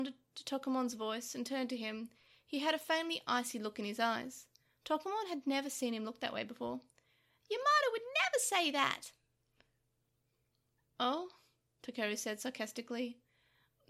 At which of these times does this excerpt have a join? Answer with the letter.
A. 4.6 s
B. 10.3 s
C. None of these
C